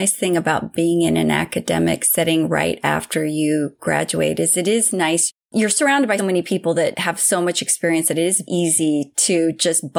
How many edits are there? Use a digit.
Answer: 2